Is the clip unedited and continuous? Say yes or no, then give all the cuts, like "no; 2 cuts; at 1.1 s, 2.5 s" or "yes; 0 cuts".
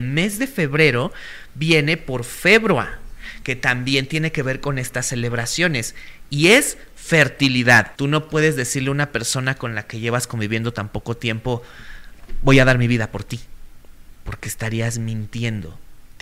no; 1 cut; at 7.9 s